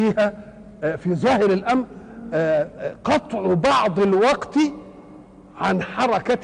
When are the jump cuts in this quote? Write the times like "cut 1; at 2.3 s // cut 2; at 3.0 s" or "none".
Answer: none